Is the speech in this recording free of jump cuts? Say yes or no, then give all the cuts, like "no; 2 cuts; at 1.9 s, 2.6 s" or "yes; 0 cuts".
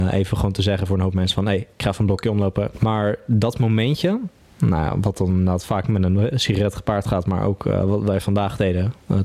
no; 1 cut; at 2.7 s